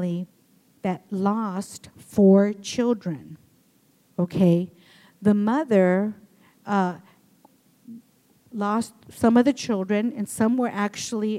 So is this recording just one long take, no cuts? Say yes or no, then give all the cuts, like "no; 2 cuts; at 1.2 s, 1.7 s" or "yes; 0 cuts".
yes; 0 cuts